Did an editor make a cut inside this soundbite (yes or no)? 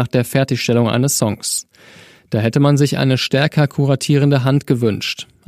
no